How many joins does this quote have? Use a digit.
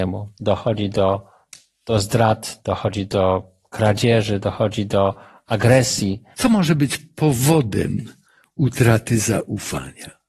1